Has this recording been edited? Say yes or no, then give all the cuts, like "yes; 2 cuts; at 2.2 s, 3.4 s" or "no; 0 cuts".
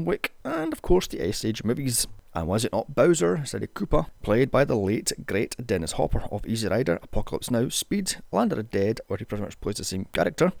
yes; 1 cut; at 2.3 s